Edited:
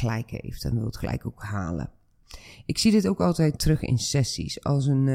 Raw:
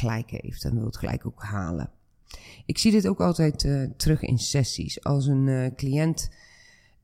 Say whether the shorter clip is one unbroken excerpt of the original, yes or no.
no